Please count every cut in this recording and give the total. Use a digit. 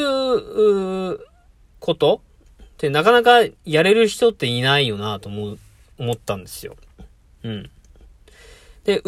0